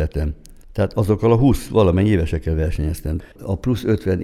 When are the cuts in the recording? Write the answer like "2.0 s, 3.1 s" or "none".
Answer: 3.3 s